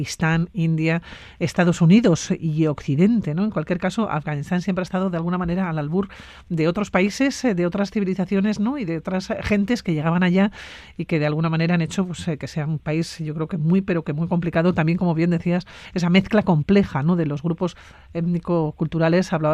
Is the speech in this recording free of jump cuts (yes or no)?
yes